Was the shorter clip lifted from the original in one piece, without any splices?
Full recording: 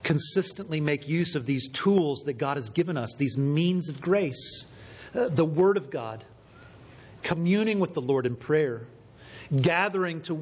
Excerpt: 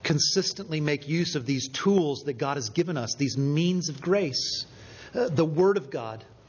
yes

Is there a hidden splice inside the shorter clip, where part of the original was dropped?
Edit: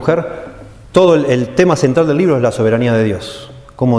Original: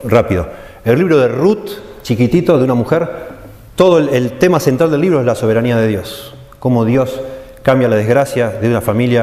no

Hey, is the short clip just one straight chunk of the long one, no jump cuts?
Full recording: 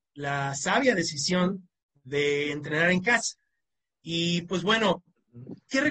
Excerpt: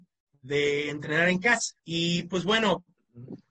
no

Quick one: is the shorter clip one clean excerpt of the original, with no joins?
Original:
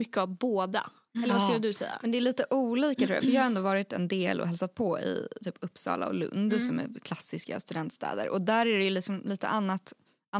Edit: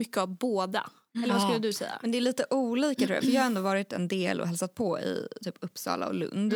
yes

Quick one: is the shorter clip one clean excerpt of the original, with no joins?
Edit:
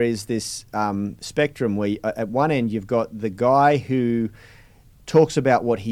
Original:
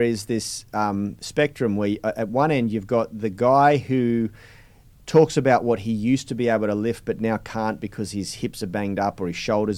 yes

